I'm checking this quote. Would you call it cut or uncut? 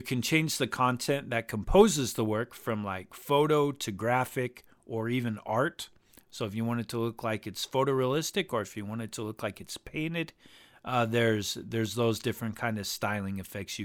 uncut